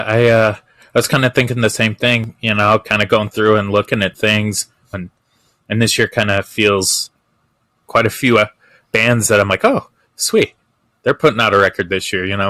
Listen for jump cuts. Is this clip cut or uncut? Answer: cut